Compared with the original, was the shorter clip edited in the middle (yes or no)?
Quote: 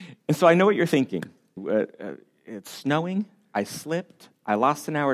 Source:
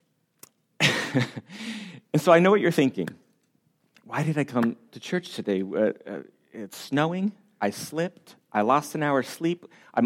yes